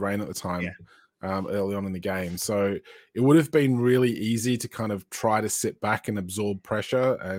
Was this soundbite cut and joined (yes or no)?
no